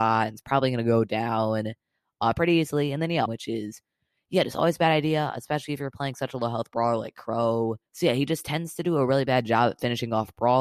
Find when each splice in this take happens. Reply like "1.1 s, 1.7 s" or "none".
3.3 s, 7.9 s